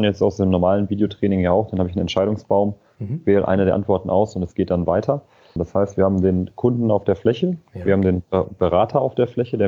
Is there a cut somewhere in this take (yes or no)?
yes